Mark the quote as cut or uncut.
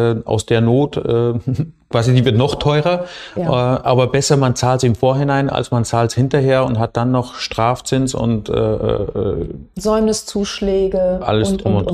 uncut